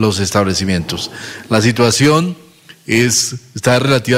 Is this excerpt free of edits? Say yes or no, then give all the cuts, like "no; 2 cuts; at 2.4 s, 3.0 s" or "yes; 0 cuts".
yes; 0 cuts